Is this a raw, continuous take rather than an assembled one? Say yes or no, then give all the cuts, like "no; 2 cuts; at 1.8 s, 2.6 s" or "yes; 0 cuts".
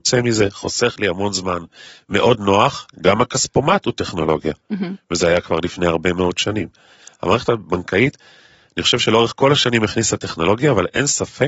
no; 1 cut; at 2.9 s